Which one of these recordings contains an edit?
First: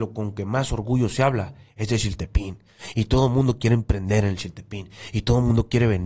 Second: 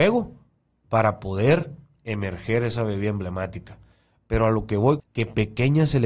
second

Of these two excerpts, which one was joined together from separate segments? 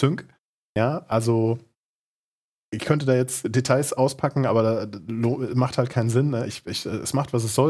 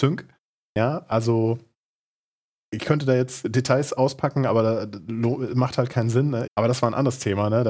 second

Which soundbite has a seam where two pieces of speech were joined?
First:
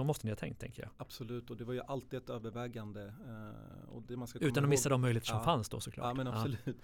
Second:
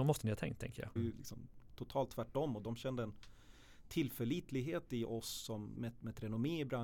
second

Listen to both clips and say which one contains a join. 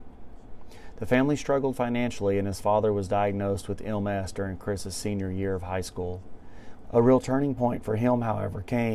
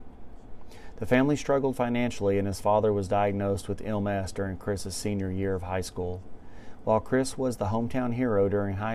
first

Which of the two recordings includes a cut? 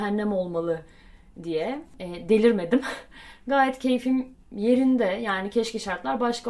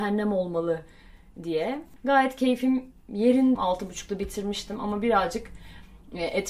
second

